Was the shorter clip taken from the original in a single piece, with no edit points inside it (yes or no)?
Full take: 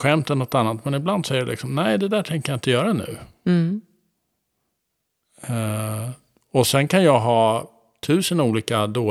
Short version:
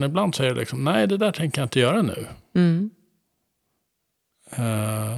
yes